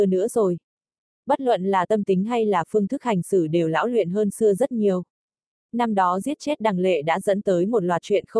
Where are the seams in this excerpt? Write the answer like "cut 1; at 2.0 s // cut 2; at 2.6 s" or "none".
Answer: none

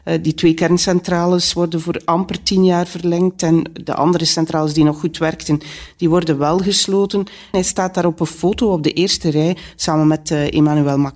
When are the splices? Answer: cut 1; at 7.5 s

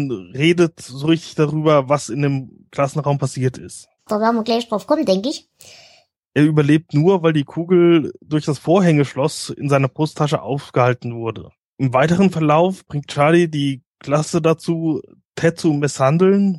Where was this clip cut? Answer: cut 1; at 4.1 s // cut 2; at 6.1 s

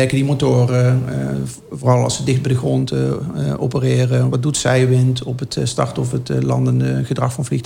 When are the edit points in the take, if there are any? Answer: none

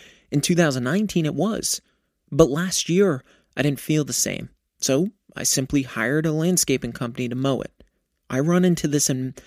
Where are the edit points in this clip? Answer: cut 1; at 8.2 s

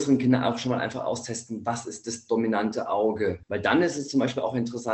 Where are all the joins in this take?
cut 1; at 3.4 s

